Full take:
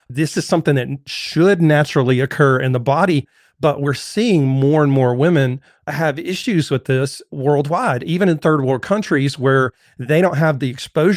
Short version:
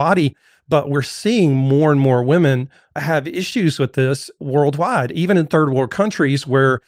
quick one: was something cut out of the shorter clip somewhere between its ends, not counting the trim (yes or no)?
no